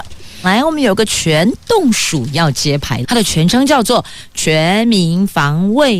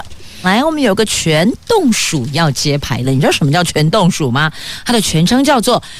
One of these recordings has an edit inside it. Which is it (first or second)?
first